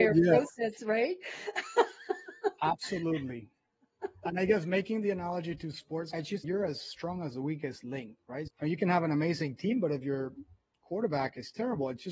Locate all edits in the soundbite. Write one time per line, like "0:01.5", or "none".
0:06.4